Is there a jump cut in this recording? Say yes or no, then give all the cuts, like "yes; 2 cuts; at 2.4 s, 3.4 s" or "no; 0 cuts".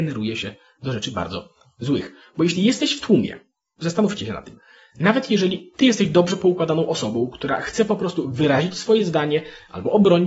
no; 0 cuts